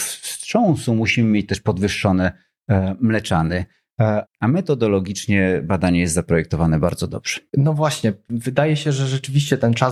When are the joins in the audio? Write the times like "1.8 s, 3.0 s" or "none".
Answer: 4.3 s